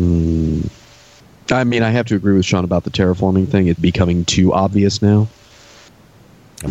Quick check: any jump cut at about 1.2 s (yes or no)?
no